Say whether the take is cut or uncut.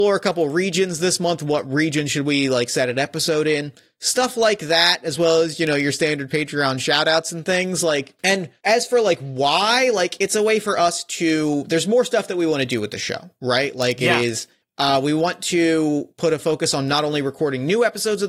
uncut